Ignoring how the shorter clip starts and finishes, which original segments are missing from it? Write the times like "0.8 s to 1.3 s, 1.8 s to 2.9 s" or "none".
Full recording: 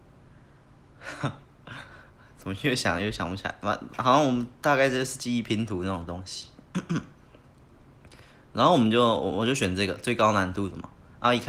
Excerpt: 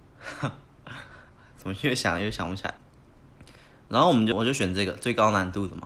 3.6 s to 7.4 s, 9.0 s to 9.3 s